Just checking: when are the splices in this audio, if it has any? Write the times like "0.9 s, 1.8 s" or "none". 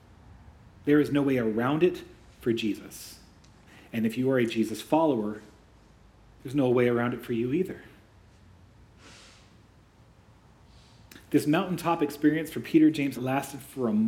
13.2 s